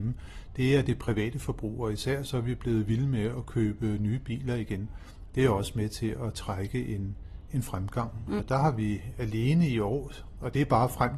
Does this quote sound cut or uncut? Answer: cut